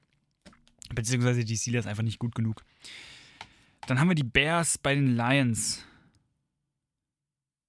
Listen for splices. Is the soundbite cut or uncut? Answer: uncut